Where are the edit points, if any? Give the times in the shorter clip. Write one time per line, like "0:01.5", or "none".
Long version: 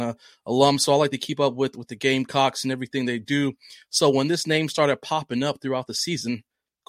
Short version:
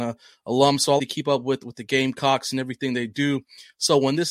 0:01.0